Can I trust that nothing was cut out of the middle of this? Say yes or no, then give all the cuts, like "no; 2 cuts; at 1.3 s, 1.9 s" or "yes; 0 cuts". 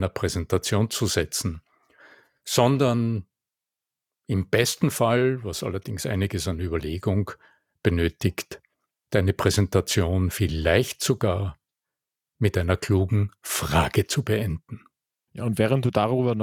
no; 1 cut; at 15.3 s